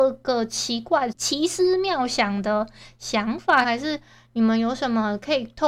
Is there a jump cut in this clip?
yes; 2 cuts; at 1.1 s, 3.6 s

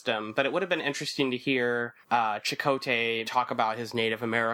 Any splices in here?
yes; 2 cuts; at 2.0 s, 3.2 s

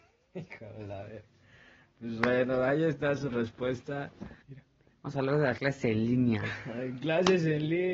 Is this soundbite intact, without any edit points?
no; 1 cut; at 4.4 s

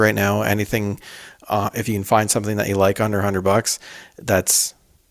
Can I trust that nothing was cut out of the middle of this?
yes; 0 cuts

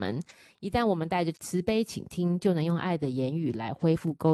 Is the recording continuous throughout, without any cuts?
no; 1 cut; at 1.3 s

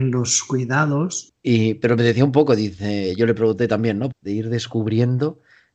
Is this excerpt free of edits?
no; 2 cuts; at 1.3 s, 4.1 s

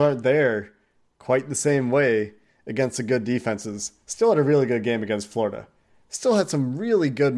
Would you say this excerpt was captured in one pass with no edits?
yes; 0 cuts

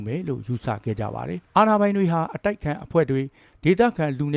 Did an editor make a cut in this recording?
yes; 1 cut; at 1.4 s

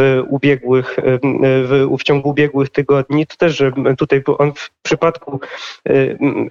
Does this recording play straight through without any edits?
yes; 0 cuts

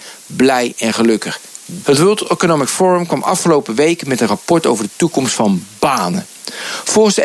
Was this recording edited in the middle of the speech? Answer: yes; 1 cut; at 1.8 s

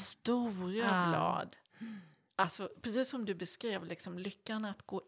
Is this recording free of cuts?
yes; 0 cuts

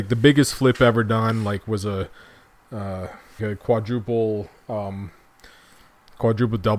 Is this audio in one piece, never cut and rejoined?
no; 1 cut; at 3.4 s

